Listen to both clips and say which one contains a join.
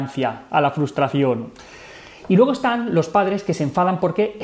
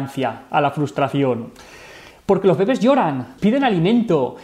second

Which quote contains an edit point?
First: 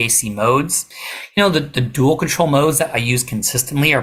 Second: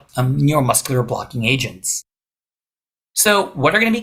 first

